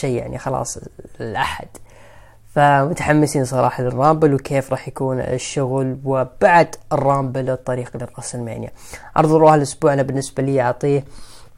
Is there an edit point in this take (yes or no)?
no